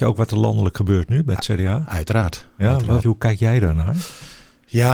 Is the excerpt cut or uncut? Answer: cut